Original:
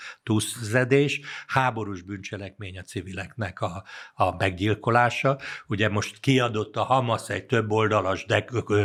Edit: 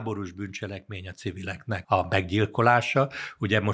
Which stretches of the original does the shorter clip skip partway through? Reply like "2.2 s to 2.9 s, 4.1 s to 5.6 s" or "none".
3.5 s to 4.1 s

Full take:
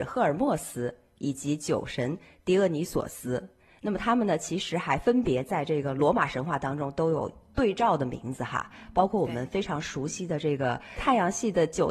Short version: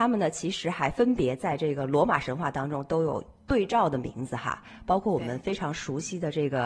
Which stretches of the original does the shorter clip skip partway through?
none

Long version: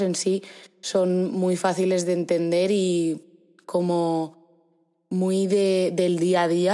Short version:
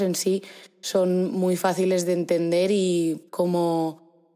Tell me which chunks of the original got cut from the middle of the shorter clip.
3.3 s to 3.6 s

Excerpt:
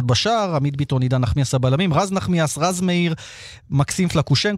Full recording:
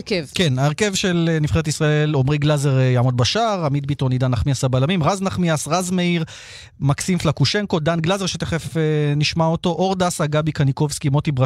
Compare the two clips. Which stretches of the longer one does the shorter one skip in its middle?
none

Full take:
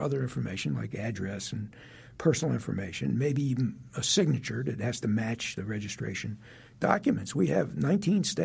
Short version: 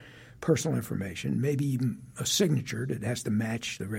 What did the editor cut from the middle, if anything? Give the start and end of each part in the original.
none

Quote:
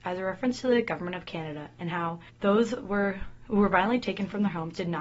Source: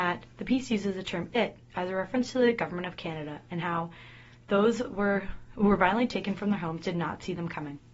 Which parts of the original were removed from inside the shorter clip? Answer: 4.0 s to 4.4 s

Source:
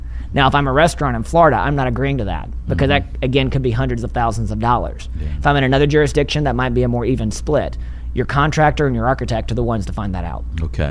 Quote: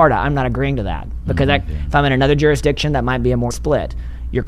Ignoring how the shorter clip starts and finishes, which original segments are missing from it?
3.1 s to 5.2 s, 7.0 s to 7.3 s

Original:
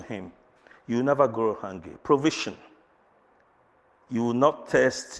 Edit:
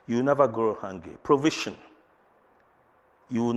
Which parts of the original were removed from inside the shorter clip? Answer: none

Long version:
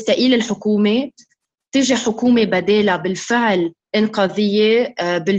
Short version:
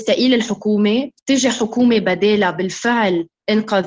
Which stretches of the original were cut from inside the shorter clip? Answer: 1.2 s to 1.6 s

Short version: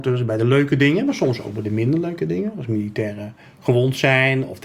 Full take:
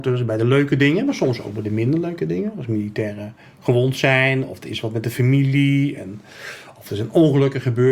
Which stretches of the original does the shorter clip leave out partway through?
none

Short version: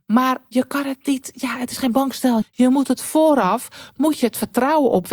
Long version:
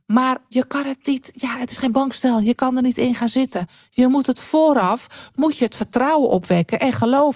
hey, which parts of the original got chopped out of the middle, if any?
2.4 s to 3.8 s

